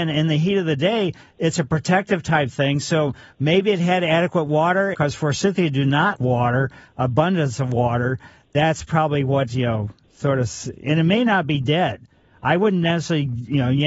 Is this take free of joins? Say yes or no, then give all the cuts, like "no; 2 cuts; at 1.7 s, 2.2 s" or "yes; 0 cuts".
no; 2 cuts; at 4.9 s, 6.2 s